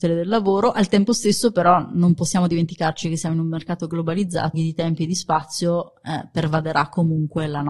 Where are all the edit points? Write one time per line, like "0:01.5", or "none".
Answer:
0:04.5